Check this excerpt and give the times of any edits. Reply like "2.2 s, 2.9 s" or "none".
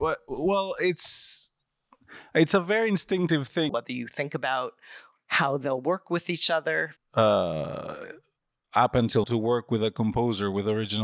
3.7 s, 7.0 s, 9.2 s